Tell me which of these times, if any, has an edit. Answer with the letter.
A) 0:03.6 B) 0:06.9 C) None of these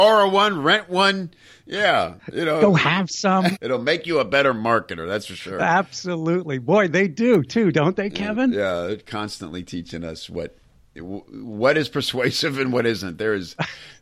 A